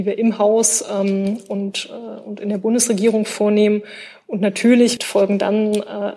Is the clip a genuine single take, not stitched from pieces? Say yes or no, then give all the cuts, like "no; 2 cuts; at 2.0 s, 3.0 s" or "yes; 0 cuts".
no; 1 cut; at 5.0 s